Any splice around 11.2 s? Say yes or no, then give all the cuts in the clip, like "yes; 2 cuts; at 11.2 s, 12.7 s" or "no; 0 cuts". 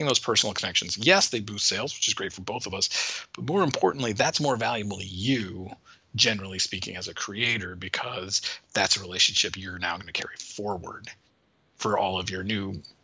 no; 0 cuts